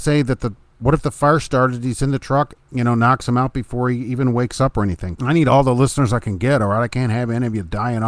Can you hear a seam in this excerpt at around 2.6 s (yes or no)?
yes